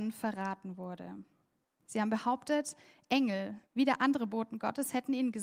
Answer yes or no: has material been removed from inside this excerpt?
yes